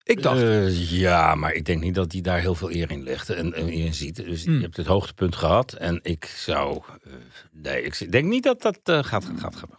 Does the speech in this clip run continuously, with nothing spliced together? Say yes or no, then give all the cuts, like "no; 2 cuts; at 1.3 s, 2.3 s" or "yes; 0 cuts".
yes; 0 cuts